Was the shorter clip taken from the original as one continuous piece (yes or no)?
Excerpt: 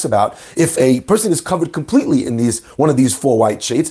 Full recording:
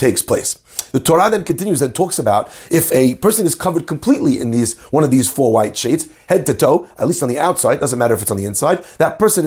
yes